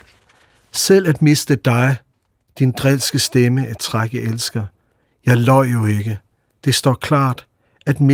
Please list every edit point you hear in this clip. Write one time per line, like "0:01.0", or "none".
none

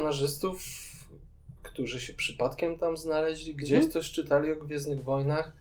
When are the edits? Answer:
0:01.6

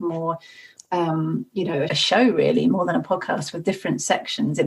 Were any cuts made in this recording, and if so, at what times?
0:01.9

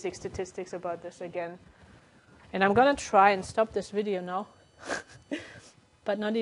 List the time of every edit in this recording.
0:02.4

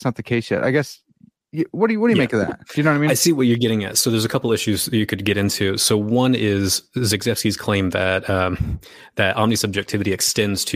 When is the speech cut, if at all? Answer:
none

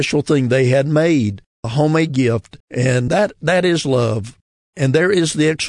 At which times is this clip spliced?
0:02.6

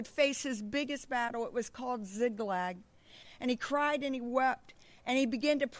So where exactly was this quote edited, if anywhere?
0:03.2

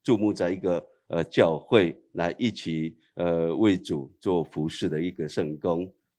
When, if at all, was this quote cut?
none

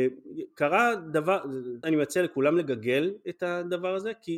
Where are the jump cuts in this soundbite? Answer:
0:01.8

